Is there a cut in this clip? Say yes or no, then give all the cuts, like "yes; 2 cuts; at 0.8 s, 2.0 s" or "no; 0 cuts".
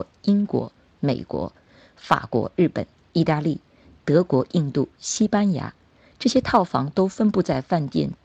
no; 0 cuts